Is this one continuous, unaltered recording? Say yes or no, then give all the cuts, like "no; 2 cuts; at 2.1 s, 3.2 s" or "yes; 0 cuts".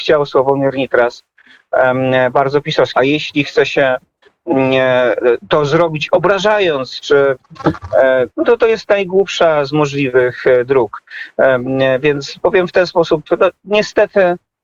no; 2 cuts; at 2.9 s, 8.3 s